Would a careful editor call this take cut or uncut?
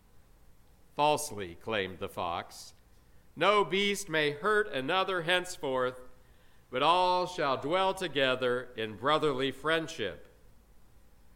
uncut